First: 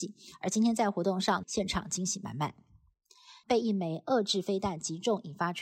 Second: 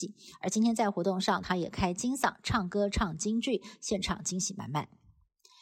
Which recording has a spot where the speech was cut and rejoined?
first; 2 cuts; at 1.4 s, 3.4 s

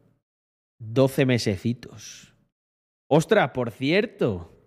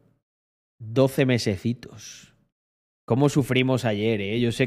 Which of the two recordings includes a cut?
second; 1 cut; at 3.0 s

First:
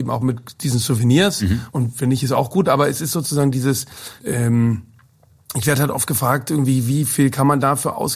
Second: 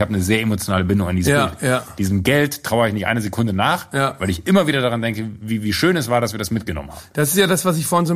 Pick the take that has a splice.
first; 2 cuts; at 1.7 s, 4.2 s

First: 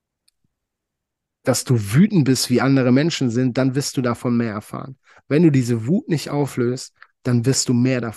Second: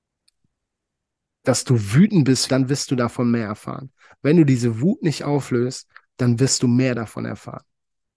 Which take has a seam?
second; 1 cut; at 2.5 s

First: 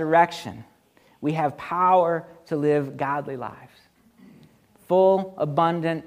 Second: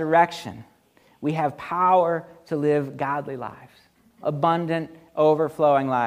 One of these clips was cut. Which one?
second; 1 cut; at 4.2 s

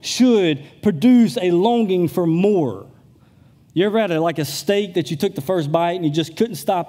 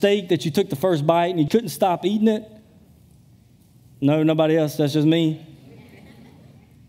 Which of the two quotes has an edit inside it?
second; 1 cut; at 1.5 s

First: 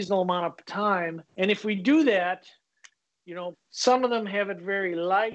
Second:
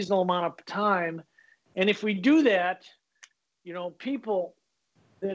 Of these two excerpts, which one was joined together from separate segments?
first; 2 cuts; at 1.3 s, 3.5 s

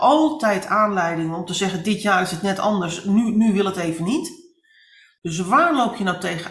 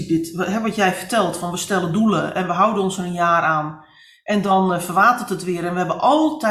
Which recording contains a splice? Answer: first; 1 cut; at 5.2 s

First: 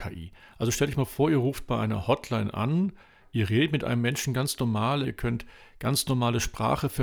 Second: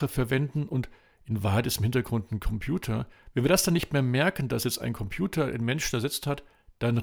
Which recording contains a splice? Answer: first; 1 cut; at 5.0 s

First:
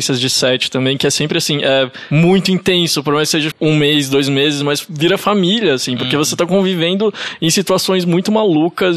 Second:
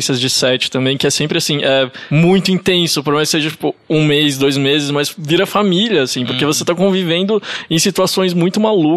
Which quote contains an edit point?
first; 1 cut; at 3.5 s

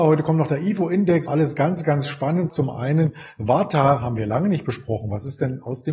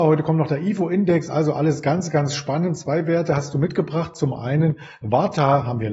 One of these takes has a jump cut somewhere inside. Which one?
first; 2 cuts; at 1.3 s, 2.5 s

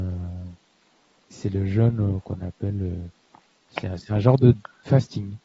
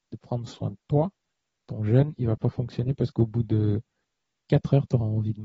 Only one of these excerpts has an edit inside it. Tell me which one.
first; 1 cut; at 1.3 s

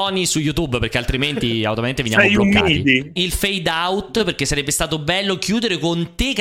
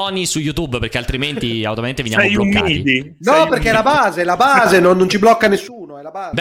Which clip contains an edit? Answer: first; 1 cut; at 3.2 s

